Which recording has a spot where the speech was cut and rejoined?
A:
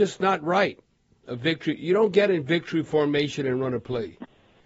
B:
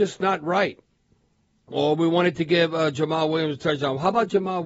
A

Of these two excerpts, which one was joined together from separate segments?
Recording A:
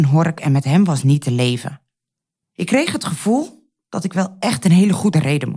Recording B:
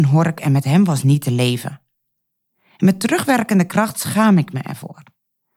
A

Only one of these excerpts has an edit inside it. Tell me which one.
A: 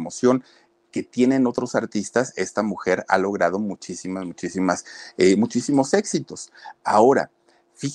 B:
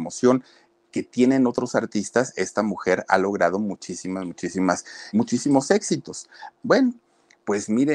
B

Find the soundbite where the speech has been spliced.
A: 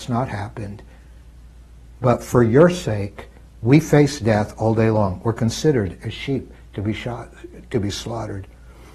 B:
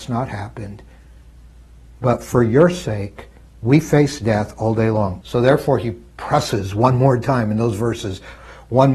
B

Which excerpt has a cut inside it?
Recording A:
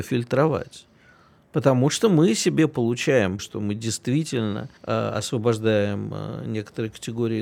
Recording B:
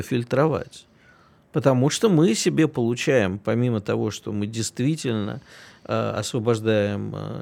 A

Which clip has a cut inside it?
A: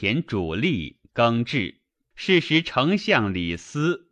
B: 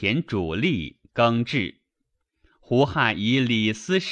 A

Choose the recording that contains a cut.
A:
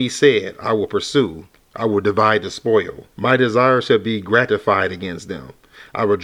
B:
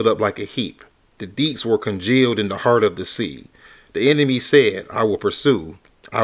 A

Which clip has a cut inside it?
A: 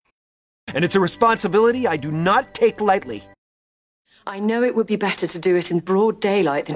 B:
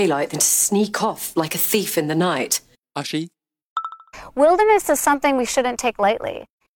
B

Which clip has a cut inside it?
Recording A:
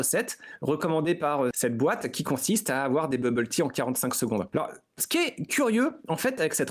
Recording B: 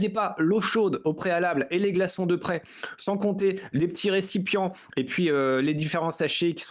A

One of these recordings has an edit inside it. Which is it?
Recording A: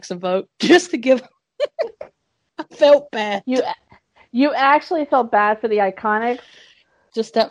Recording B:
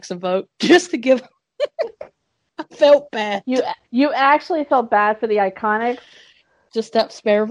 B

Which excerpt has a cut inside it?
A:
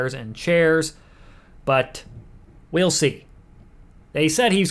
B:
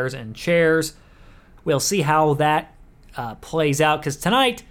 B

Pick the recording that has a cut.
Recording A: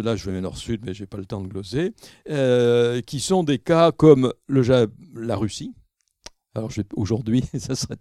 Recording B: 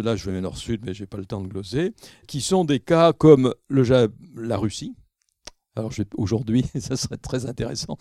B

